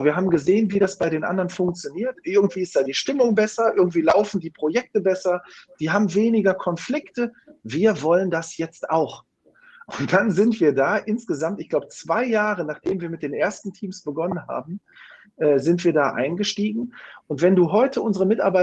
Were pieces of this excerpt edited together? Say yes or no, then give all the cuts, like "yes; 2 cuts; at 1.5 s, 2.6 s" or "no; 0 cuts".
no; 0 cuts